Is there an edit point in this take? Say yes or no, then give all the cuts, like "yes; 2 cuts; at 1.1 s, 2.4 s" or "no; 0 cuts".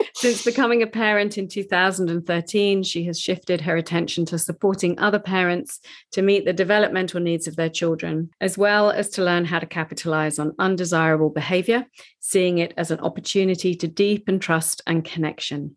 no; 0 cuts